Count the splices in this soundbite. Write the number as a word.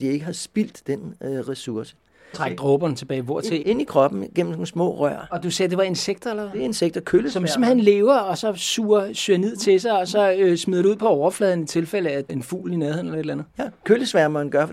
three